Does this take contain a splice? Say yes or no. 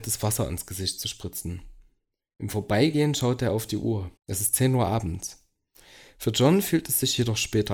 yes